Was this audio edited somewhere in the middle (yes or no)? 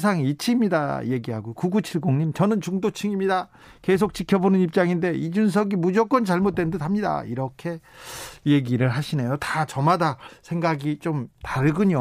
no